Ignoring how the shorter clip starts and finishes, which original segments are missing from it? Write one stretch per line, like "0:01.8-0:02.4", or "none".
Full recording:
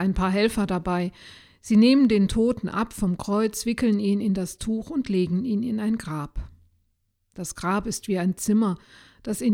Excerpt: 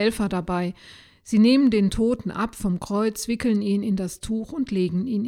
none